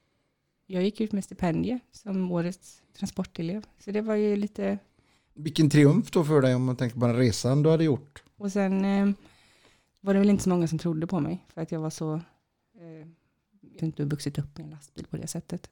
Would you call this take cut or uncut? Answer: cut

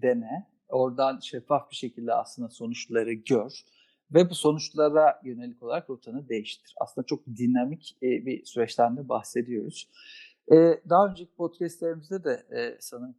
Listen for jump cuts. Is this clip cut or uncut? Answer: uncut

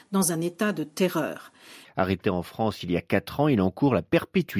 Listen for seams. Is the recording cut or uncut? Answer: cut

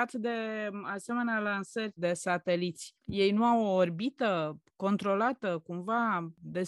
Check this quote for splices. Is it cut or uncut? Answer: cut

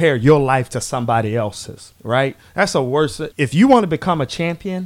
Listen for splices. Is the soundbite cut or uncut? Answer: cut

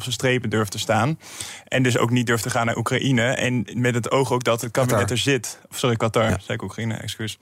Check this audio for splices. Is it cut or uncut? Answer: uncut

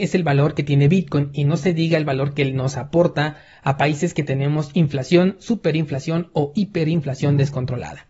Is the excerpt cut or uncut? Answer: uncut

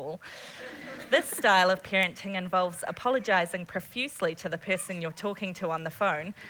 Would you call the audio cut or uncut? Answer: uncut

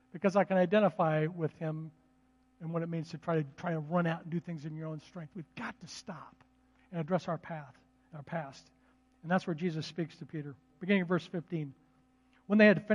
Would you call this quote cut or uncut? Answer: cut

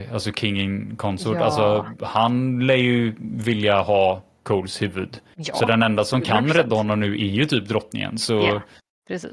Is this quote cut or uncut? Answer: uncut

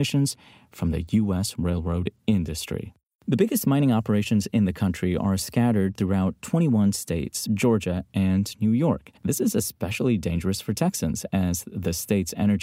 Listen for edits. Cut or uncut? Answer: cut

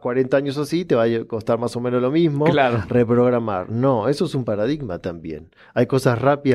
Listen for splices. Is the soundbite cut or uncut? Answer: uncut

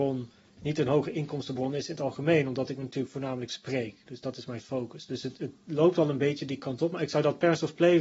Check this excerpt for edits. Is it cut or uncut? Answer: uncut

